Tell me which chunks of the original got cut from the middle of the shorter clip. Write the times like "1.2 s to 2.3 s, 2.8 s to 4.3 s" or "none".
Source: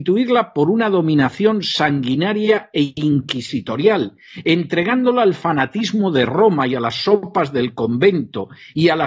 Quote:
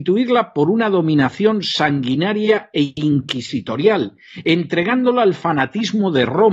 none